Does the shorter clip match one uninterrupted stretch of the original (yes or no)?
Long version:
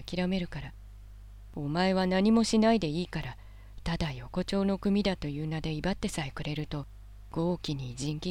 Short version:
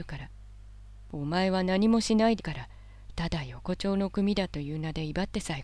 no